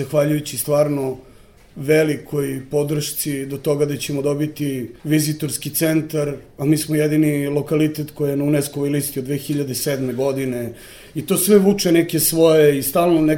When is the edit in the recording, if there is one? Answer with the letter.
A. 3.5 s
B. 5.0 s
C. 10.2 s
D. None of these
B